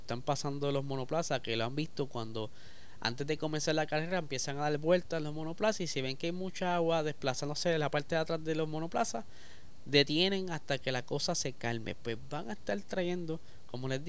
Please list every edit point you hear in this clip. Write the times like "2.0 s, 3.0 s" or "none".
none